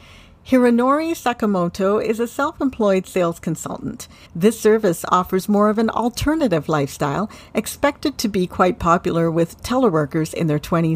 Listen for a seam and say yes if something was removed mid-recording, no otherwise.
yes